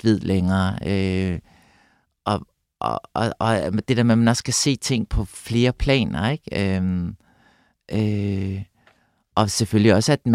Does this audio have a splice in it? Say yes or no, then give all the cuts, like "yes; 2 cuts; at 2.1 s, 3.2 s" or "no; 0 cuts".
no; 0 cuts